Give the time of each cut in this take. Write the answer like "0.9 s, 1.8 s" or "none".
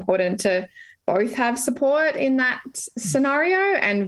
none